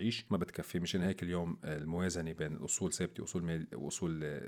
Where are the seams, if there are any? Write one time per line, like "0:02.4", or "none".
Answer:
none